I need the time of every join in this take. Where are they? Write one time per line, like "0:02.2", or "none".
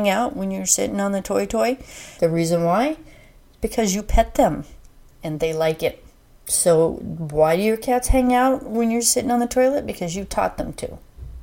0:02.2